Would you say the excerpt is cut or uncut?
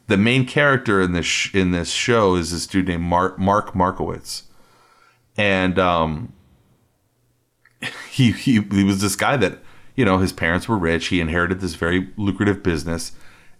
uncut